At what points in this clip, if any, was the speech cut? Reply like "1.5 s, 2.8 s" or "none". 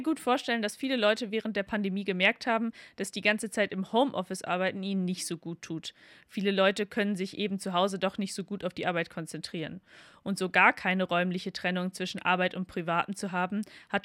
none